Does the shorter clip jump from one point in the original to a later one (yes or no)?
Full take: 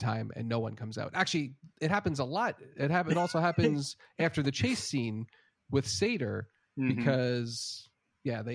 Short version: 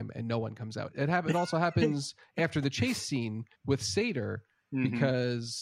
yes